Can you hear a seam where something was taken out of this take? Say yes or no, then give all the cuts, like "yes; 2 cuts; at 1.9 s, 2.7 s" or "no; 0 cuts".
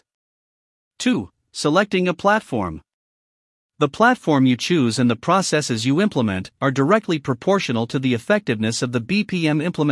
no; 0 cuts